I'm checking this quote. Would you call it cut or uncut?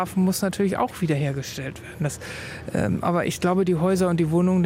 uncut